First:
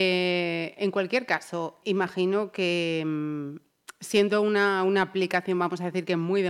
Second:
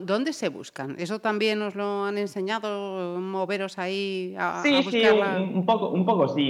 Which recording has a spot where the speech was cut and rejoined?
first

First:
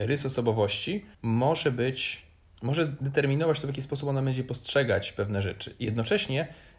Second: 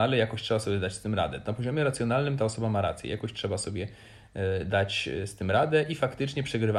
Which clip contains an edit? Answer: first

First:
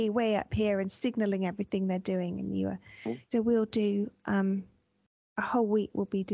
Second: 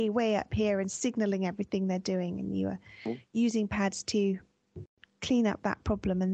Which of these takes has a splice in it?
first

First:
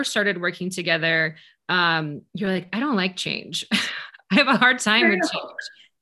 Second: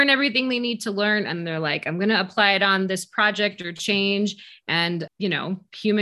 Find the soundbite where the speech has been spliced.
second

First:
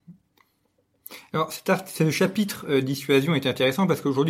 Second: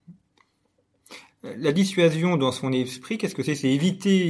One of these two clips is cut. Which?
second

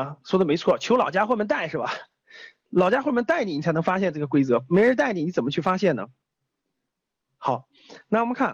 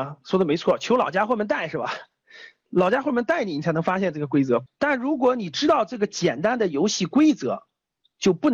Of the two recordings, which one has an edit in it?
second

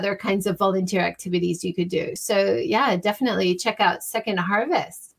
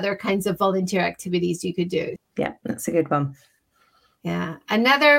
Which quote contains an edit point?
second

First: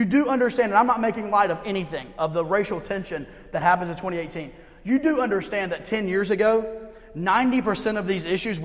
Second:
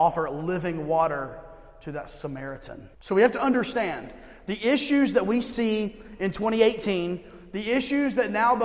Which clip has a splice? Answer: second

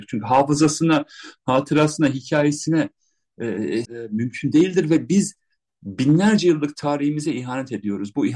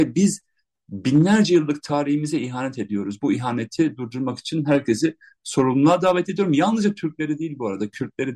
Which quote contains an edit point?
first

